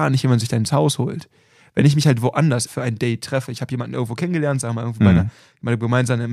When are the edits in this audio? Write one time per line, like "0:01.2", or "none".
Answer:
0:02.7